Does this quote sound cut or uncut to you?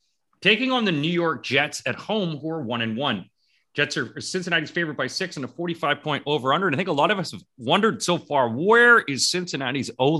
uncut